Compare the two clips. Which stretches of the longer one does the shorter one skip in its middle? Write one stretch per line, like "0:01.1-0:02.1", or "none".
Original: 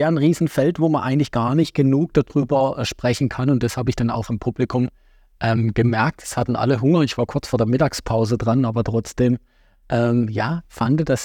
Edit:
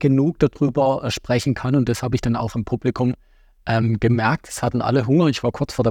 none